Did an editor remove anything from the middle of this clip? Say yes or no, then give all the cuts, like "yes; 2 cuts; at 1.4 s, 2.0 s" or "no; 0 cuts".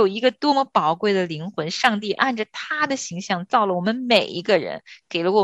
no; 0 cuts